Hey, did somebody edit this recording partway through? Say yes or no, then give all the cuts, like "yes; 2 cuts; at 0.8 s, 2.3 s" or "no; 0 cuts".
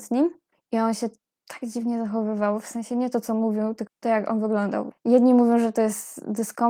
yes; 2 cuts; at 3.9 s, 4.9 s